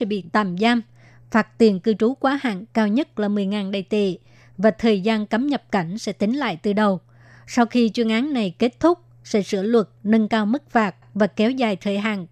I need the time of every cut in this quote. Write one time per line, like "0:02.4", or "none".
none